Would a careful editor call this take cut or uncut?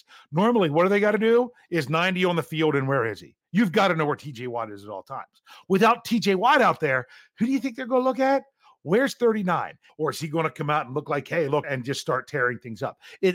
cut